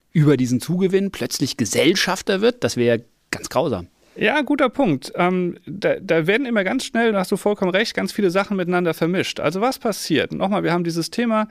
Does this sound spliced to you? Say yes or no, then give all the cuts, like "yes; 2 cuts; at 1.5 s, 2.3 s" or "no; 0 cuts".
no; 0 cuts